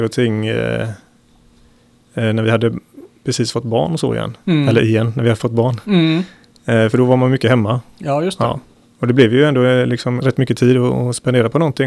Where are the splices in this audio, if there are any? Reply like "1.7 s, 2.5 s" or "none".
10.2 s